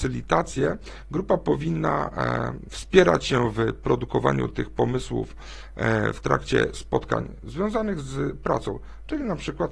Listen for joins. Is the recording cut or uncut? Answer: cut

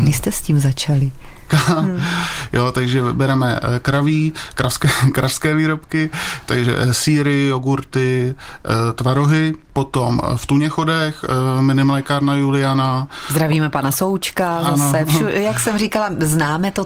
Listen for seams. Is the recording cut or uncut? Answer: cut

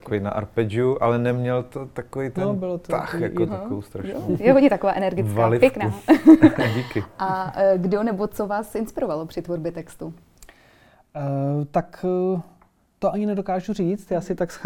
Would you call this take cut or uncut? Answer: cut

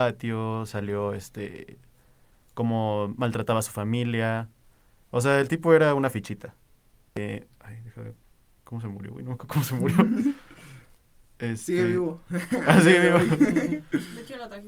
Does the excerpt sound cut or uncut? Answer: uncut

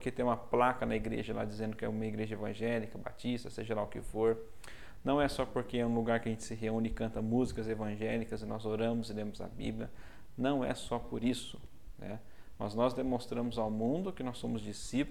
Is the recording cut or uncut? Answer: uncut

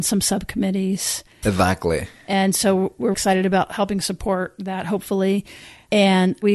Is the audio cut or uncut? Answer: cut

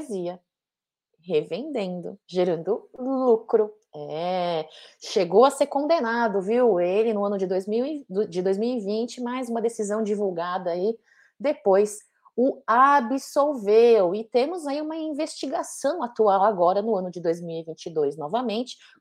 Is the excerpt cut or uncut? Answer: cut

